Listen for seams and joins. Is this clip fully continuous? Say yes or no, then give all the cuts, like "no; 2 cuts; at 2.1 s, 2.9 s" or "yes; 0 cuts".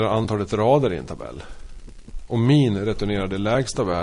no; 1 cut; at 2.3 s